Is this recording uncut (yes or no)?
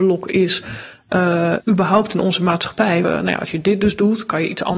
no